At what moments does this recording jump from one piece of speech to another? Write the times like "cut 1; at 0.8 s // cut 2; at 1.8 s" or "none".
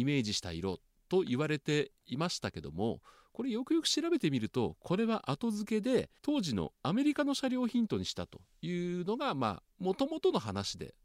cut 1; at 6.2 s // cut 2; at 9.7 s